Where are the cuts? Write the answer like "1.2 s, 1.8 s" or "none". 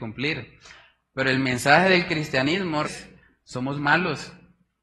2.8 s